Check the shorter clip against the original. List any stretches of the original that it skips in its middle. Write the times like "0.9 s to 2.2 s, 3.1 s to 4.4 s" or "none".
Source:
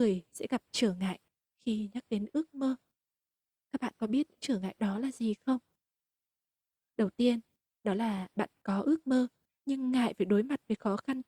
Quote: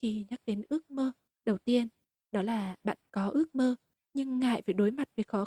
3.0 s to 6.9 s